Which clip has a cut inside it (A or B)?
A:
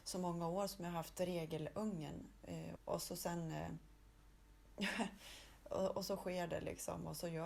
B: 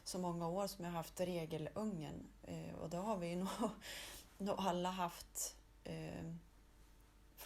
A